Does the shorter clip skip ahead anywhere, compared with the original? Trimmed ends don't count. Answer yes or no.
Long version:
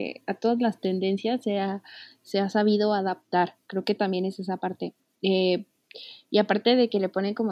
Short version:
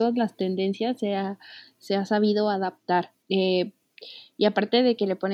yes